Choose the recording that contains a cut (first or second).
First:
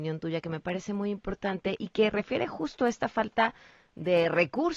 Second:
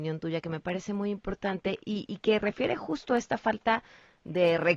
first